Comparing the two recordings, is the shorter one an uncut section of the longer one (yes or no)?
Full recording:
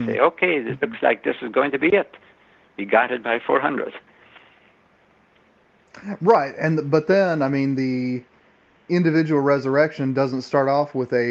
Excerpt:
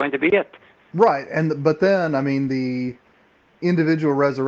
no